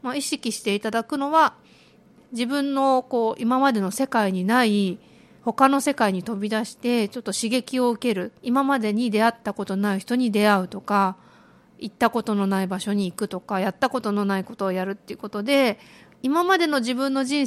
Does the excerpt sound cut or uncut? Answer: cut